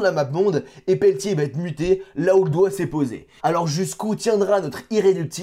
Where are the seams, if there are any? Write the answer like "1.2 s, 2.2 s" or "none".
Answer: 3.4 s